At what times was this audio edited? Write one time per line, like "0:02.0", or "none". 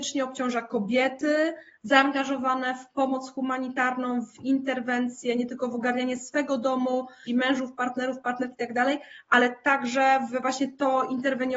0:07.3